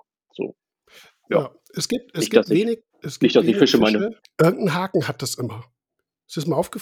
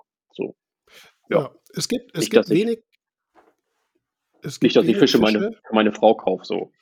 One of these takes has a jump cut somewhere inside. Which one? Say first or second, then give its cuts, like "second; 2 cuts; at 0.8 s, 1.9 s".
first; 2 cuts; at 2.9 s, 4.2 s